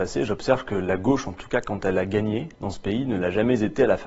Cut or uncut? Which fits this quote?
cut